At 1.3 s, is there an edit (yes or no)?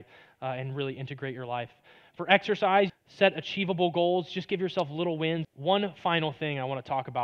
no